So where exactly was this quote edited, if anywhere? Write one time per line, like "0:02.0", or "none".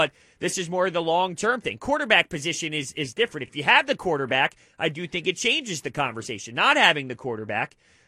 none